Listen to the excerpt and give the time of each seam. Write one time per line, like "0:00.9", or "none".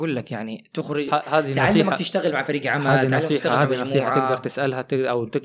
none

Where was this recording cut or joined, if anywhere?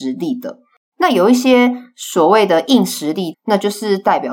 0:00.9
0:03.3

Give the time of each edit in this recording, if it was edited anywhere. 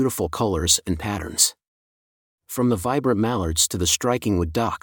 none

